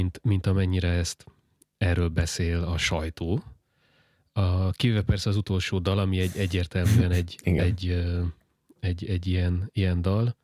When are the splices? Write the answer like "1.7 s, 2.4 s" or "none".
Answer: none